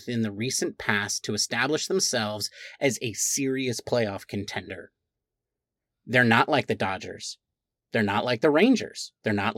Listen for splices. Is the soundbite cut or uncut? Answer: uncut